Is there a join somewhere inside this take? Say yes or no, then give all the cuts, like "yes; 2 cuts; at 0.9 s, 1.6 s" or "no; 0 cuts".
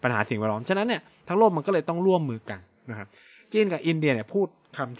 no; 0 cuts